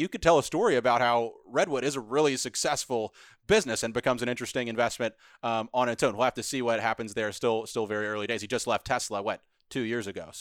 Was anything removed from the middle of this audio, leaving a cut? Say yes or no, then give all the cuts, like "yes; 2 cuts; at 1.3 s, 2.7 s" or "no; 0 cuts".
no; 0 cuts